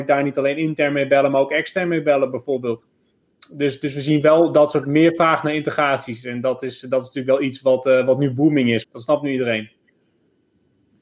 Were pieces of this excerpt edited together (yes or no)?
yes